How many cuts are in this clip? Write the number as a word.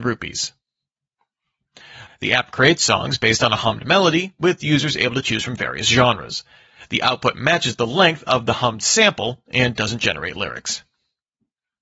one